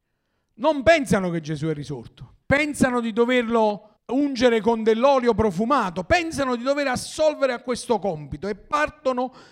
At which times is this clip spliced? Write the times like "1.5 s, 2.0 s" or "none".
2.4 s, 4.0 s